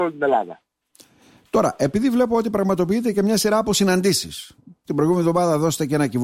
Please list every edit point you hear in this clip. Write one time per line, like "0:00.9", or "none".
none